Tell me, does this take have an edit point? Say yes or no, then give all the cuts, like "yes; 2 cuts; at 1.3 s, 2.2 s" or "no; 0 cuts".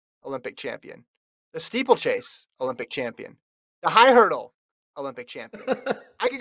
no; 0 cuts